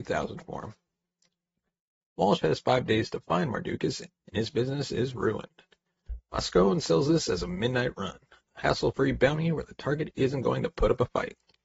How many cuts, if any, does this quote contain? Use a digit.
1